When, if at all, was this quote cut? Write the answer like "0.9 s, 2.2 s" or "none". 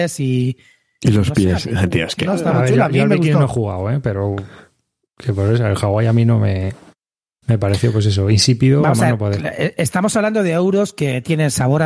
2.2 s